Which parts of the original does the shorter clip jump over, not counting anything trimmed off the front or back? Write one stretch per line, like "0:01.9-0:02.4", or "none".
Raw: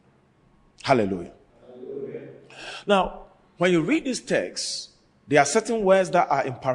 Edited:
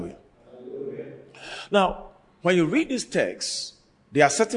none